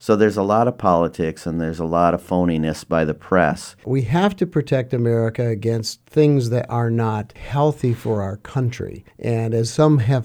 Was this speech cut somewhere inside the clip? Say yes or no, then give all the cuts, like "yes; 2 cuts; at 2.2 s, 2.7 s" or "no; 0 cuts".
yes; 1 cut; at 3.8 s